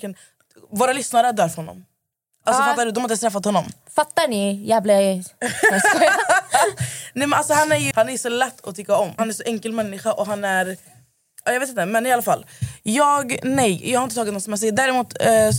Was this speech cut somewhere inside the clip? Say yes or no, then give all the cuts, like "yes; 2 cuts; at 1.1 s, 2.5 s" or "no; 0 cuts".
yes; 2 cuts; at 7.9 s, 9.2 s